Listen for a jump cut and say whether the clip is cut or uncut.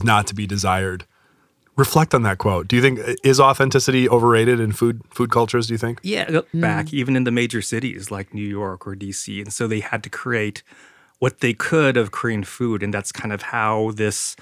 cut